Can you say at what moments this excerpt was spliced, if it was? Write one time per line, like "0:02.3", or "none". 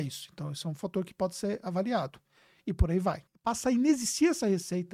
0:03.3